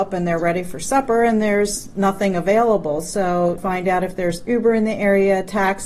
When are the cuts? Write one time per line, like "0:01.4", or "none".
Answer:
0:03.6